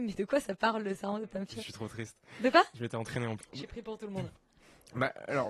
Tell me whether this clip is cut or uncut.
cut